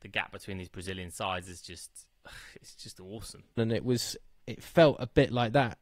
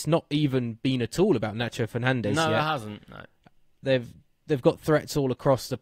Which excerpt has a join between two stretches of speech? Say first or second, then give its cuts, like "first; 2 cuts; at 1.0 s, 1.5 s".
first; 1 cut; at 3.6 s